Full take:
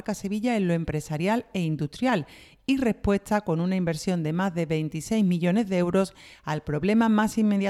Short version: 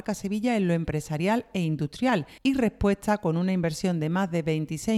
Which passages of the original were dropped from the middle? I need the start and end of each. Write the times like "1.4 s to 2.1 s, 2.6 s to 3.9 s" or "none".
2.4 s to 2.6 s